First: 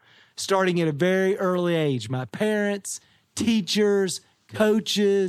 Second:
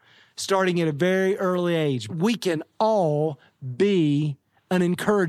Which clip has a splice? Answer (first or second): second